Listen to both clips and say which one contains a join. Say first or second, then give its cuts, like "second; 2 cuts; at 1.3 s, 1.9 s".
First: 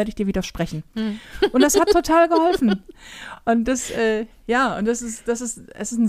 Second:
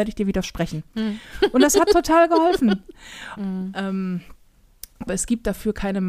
second; 2 cuts; at 3.4 s, 5.1 s